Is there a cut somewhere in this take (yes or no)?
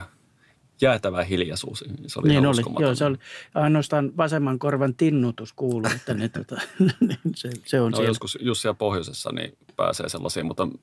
no